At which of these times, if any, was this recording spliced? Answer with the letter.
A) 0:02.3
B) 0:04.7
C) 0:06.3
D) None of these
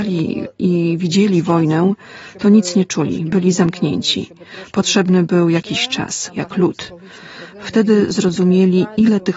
C